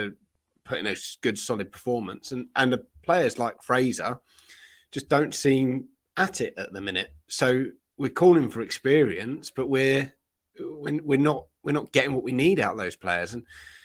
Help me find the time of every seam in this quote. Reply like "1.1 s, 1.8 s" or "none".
none